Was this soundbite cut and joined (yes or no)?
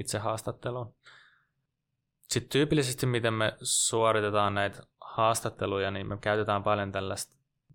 no